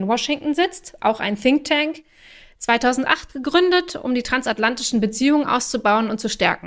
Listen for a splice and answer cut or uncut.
uncut